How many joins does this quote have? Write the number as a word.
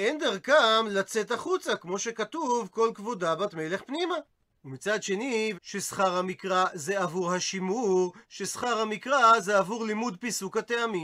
three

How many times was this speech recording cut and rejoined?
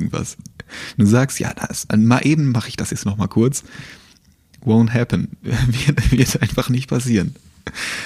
one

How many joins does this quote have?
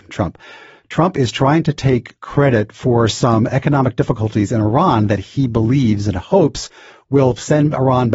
zero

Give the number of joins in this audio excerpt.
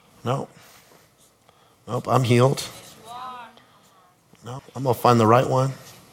one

